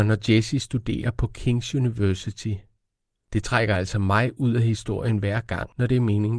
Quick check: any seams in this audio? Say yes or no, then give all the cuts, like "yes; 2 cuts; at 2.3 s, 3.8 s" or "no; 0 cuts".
no; 0 cuts